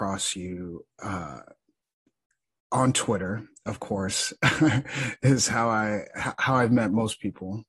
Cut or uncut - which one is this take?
uncut